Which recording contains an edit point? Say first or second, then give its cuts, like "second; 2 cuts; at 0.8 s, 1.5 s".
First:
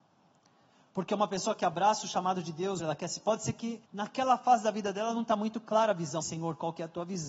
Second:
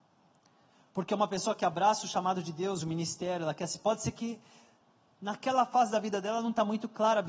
first; 3 cuts; at 2.8 s, 3.9 s, 6.2 s